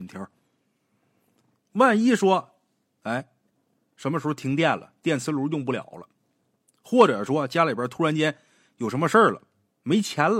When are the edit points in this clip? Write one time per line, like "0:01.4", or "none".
none